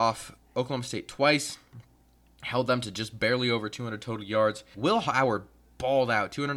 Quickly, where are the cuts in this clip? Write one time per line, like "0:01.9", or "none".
0:04.7

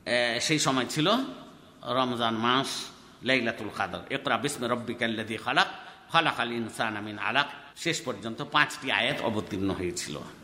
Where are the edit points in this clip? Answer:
0:07.7

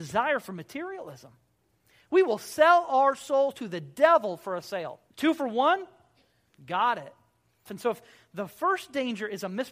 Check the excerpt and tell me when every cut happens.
0:05.1
0:07.7

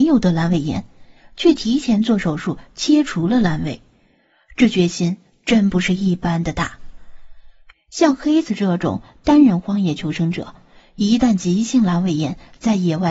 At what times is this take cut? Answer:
0:07.7

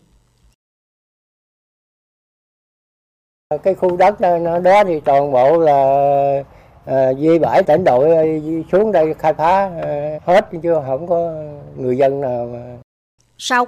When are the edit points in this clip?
0:07.7
0:10.2

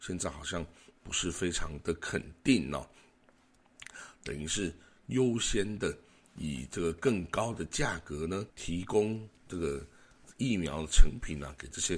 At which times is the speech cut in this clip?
0:04.2
0:08.5

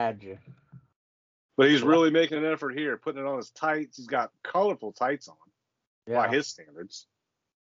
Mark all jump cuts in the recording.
0:01.5

